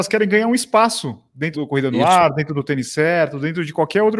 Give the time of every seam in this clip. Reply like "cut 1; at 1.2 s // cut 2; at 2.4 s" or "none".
cut 1; at 1.5 s